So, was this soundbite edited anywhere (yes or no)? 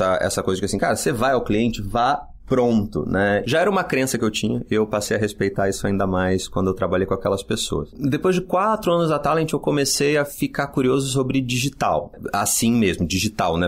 no